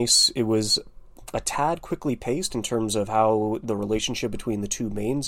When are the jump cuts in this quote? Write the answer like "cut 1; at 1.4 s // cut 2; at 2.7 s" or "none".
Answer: none

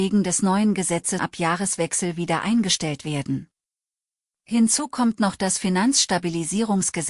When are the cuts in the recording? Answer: cut 1; at 1.2 s // cut 2; at 4.3 s

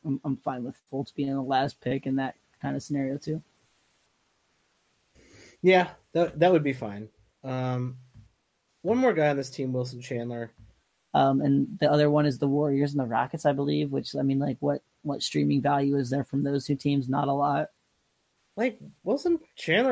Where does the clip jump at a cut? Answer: cut 1; at 11.1 s // cut 2; at 18.4 s

